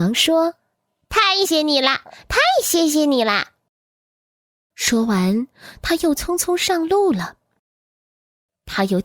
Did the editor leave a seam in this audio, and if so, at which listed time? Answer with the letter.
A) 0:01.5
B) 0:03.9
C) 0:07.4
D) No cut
A